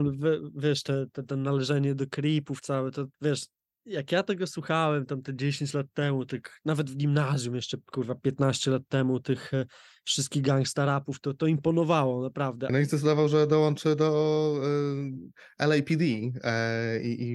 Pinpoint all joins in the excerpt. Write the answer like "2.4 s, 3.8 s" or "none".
3.1 s, 12.7 s